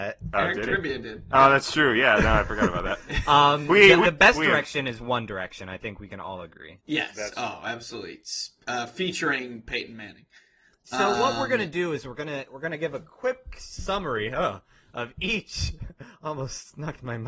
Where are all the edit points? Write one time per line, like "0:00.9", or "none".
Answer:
0:04.0

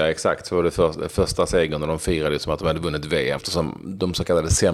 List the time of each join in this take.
0:03.4

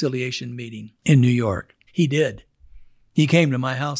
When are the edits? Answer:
0:01.9

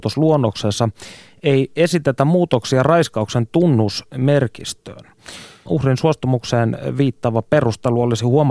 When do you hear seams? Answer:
0:05.7

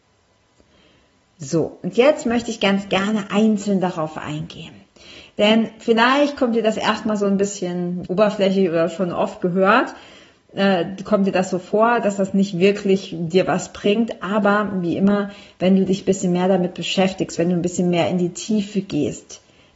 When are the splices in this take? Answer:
0:08.1

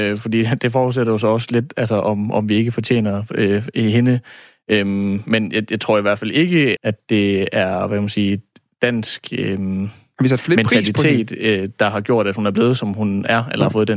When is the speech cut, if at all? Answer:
0:06.8

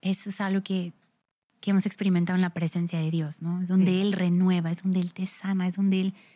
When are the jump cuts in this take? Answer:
none

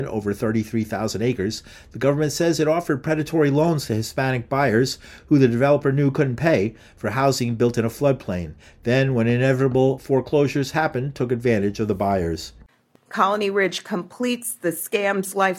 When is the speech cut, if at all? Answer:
none

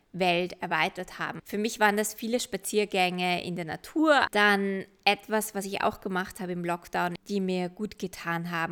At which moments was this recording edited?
0:01.4
0:04.3
0:07.2

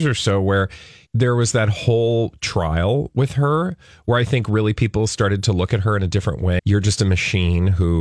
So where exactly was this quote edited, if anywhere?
0:01.1
0:06.6

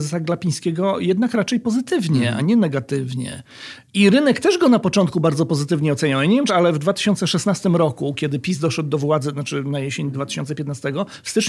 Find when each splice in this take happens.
0:06.5

